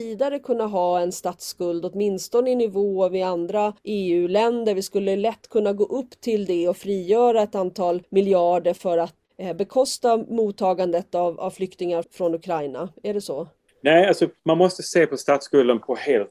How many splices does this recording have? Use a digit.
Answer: 1